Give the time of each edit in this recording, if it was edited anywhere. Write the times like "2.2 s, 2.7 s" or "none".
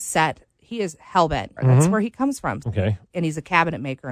1.6 s, 2.6 s